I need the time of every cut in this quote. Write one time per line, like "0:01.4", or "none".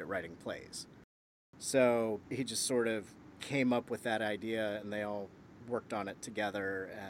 none